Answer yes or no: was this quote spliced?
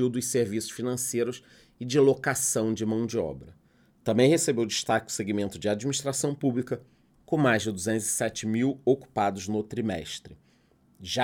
no